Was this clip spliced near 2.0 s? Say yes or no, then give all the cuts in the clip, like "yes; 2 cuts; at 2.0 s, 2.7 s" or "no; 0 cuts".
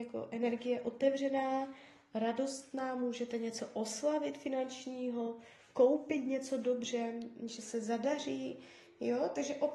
no; 0 cuts